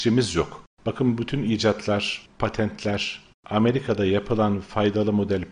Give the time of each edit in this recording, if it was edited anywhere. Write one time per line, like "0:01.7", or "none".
0:03.3